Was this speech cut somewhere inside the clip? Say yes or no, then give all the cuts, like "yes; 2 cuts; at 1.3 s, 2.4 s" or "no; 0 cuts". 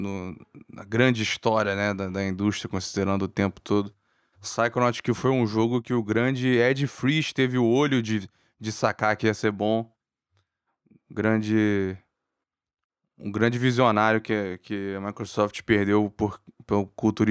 no; 0 cuts